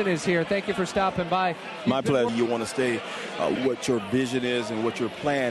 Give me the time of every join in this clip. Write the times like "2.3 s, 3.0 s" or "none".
2.3 s, 3.6 s